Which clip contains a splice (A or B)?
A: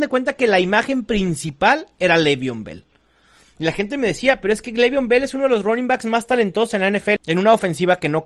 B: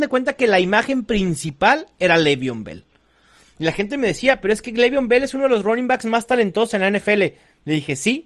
A